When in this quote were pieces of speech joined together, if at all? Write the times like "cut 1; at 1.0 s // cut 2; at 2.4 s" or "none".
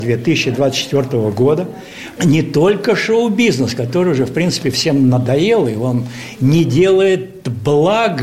cut 1; at 2.2 s